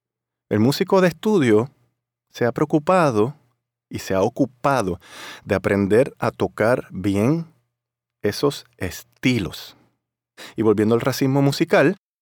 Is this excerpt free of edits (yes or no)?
yes